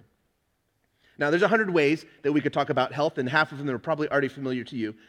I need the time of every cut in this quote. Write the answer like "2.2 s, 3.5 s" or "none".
none